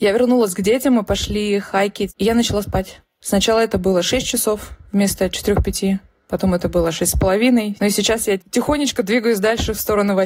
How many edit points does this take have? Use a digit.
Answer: 2